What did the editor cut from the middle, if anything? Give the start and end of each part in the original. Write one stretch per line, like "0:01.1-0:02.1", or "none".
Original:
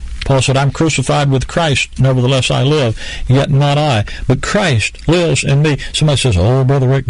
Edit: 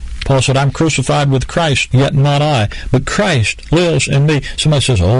0:01.9-0:03.3